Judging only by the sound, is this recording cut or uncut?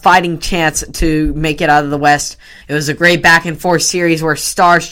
cut